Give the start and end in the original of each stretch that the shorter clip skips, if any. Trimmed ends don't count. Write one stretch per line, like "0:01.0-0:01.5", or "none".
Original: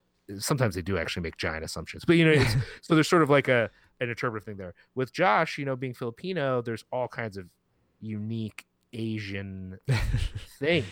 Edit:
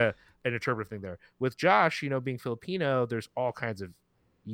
none